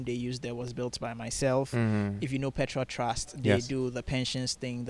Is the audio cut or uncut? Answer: uncut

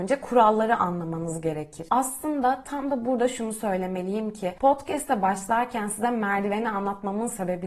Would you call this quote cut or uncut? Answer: uncut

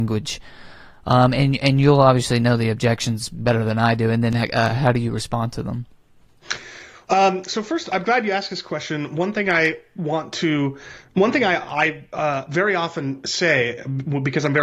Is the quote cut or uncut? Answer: uncut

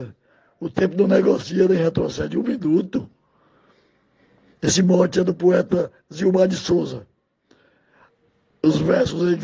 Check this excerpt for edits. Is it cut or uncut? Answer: uncut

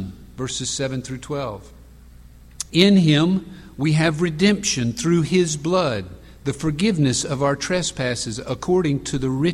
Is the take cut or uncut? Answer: cut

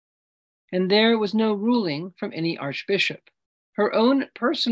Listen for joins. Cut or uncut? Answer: cut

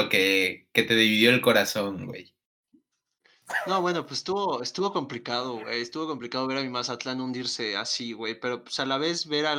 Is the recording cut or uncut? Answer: uncut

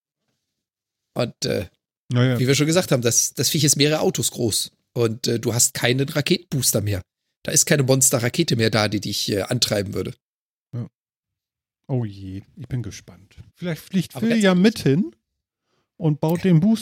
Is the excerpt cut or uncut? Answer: cut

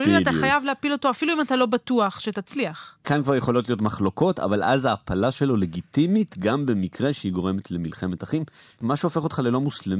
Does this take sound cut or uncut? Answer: uncut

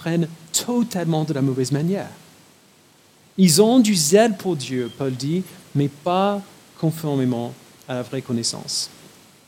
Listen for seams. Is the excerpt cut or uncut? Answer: uncut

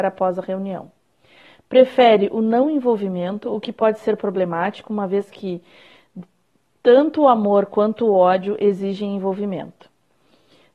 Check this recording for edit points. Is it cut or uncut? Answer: uncut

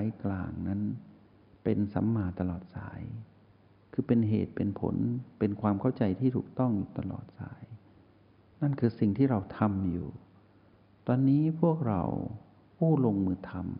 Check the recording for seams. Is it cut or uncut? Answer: uncut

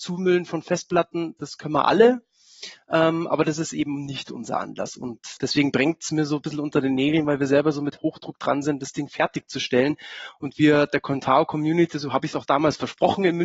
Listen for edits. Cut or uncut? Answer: cut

